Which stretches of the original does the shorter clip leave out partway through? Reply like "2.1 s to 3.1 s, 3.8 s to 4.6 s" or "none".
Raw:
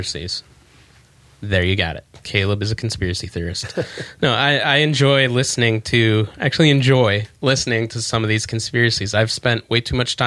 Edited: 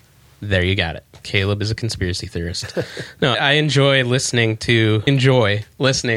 4.3 s to 4.6 s, 6.3 s to 6.7 s